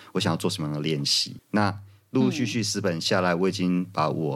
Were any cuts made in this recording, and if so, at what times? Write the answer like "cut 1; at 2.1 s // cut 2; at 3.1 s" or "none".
none